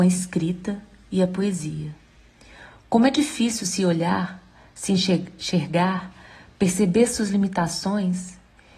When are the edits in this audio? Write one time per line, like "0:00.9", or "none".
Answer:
0:02.7